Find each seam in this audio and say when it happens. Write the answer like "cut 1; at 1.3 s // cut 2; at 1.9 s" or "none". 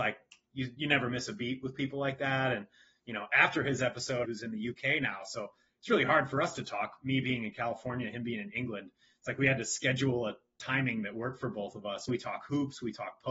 cut 1; at 4.2 s // cut 2; at 12.1 s